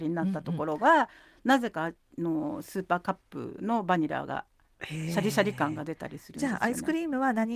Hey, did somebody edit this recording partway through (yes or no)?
no